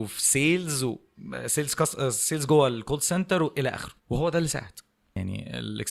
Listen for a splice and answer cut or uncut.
cut